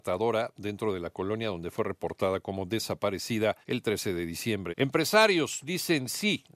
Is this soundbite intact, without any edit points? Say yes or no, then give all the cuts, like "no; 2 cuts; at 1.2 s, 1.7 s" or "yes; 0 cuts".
no; 2 cuts; at 3.6 s, 4.7 s